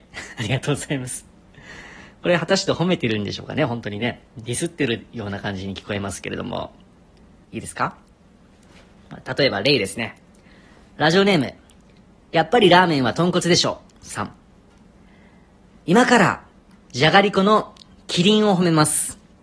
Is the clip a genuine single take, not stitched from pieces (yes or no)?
no